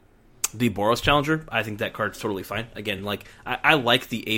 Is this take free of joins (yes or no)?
yes